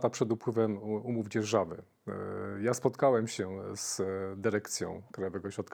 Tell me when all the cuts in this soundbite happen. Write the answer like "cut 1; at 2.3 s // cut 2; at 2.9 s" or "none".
none